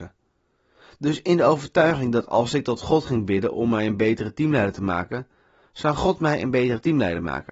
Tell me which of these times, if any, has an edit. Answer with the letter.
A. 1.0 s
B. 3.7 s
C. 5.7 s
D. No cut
D